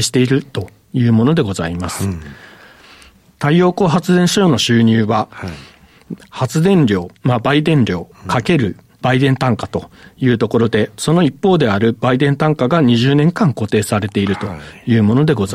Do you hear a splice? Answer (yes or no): yes